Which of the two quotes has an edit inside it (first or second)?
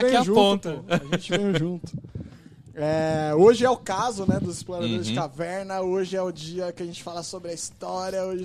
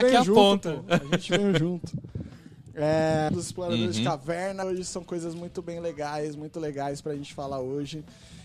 second